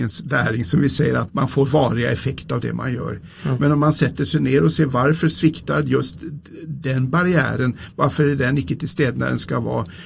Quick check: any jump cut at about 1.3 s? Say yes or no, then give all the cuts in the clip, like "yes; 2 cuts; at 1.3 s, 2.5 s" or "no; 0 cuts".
yes; 2 cuts; at 1.3 s, 3.3 s